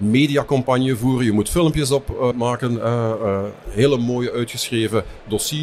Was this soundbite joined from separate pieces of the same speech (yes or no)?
yes